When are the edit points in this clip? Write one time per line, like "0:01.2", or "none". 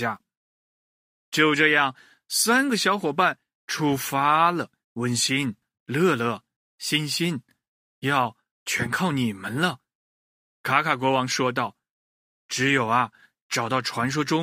0:04.8